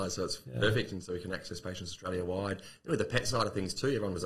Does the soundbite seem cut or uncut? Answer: uncut